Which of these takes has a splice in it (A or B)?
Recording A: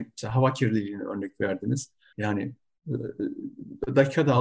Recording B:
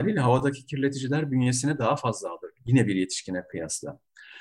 A